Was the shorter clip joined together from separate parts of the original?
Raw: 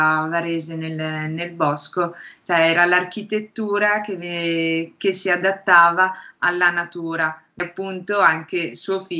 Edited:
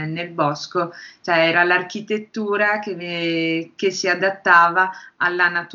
no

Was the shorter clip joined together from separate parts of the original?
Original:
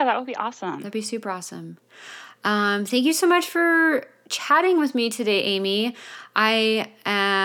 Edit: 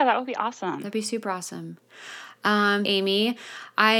yes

